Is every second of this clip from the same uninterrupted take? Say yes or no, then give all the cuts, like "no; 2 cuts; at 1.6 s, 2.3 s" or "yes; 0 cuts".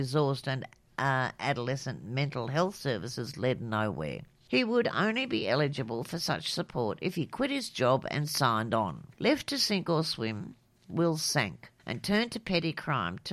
no; 3 cuts; at 4.5 s, 9.1 s, 11.8 s